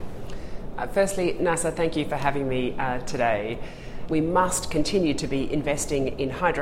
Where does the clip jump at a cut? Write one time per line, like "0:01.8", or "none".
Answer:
0:04.1